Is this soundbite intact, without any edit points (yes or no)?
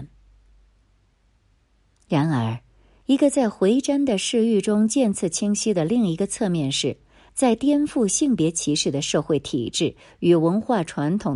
no